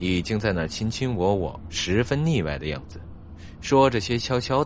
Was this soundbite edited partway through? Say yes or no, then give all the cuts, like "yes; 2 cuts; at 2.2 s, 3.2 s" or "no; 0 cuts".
yes; 1 cut; at 1.7 s